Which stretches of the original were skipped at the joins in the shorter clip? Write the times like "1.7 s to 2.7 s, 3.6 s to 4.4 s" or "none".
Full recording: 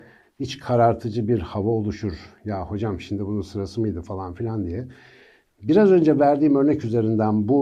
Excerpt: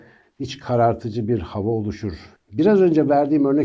2.4 s to 5.5 s